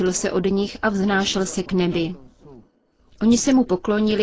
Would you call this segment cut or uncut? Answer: uncut